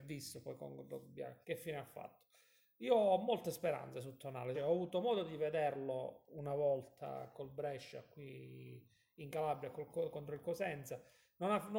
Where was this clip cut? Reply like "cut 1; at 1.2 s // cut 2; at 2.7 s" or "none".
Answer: cut 1; at 1.4 s // cut 2; at 4.5 s